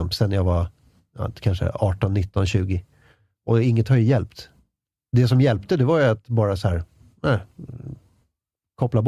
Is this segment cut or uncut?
uncut